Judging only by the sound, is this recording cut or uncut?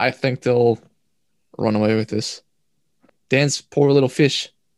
cut